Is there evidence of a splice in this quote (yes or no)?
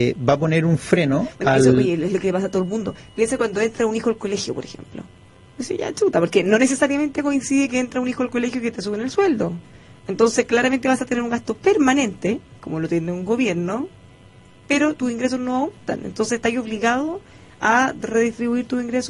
no